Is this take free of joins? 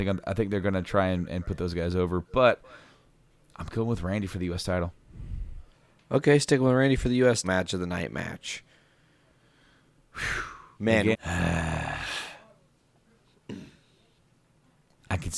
no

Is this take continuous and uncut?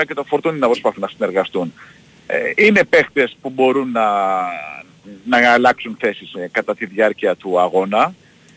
no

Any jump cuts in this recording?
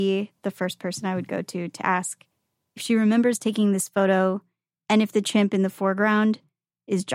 yes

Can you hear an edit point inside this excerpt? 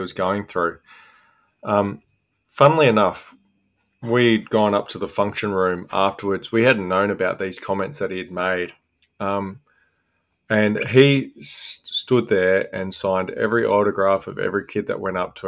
no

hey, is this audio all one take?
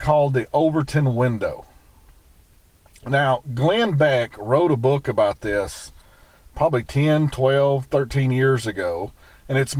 yes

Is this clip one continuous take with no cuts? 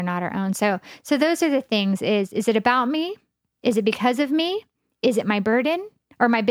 yes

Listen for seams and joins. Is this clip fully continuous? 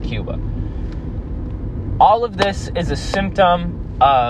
yes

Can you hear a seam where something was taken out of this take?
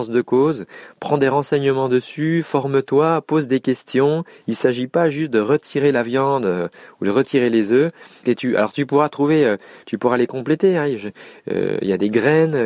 yes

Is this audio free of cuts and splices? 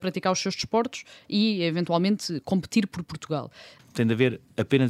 no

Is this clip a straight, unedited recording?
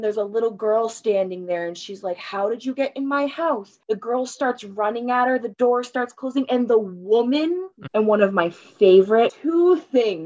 no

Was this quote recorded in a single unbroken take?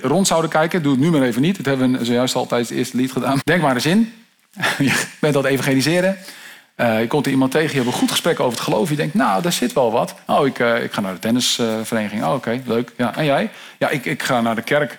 no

